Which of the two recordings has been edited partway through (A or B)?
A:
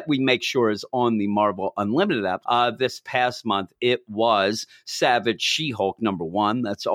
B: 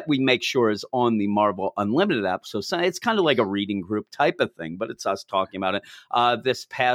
A